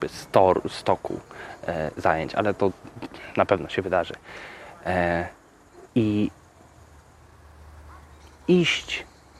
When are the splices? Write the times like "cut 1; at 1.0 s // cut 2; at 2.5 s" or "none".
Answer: cut 1; at 5.9 s